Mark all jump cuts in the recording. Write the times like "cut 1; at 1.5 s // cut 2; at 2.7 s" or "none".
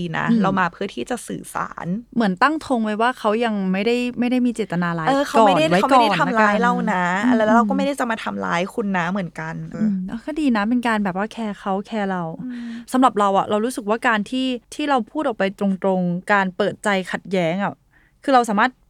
cut 1; at 9.7 s // cut 2; at 14.6 s